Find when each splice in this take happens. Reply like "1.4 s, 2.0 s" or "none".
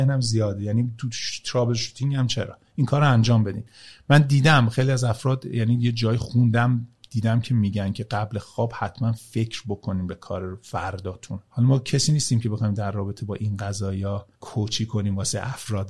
11.5 s, 14.3 s